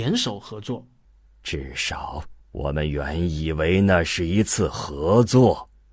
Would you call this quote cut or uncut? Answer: cut